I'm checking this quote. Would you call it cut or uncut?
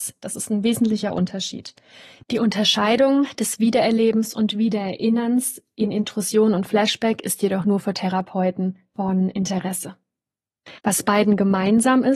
cut